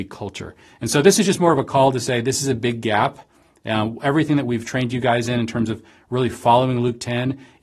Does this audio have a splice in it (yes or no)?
no